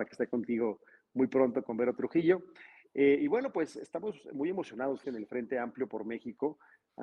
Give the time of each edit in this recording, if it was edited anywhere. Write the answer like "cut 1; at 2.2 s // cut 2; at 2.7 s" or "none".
cut 1; at 5.0 s